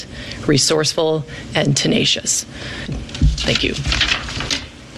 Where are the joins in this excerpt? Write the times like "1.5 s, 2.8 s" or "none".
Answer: 2.9 s